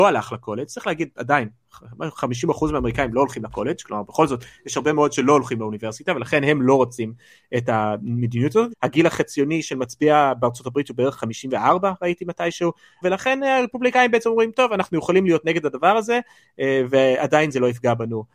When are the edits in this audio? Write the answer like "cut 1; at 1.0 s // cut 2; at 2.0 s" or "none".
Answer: cut 1; at 8.7 s // cut 2; at 13.0 s

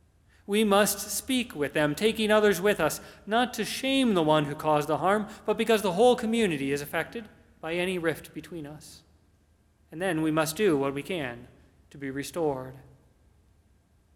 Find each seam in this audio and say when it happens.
none

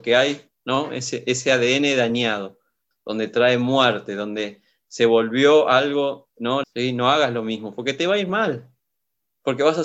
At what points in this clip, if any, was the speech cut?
cut 1; at 2.9 s // cut 2; at 6.6 s

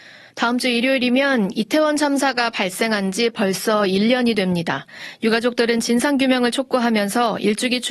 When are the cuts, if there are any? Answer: none

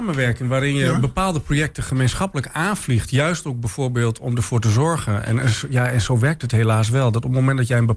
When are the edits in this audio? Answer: none

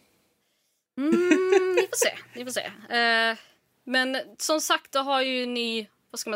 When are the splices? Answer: none

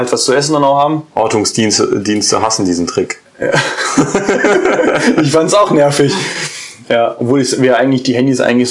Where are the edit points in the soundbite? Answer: none

